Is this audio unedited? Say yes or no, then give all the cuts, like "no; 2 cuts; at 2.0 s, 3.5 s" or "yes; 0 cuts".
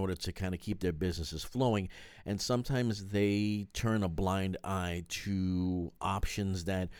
yes; 0 cuts